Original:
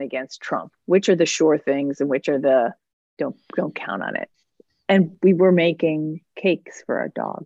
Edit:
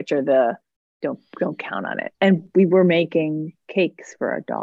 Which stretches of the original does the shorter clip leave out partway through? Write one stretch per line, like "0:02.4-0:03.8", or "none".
0:04.3-0:04.8